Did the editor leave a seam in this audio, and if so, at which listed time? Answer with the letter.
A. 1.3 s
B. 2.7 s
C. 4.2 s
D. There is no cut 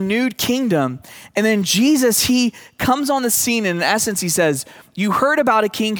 D